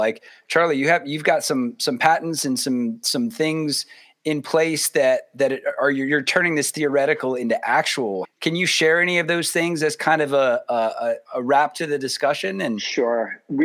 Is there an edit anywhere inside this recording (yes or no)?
yes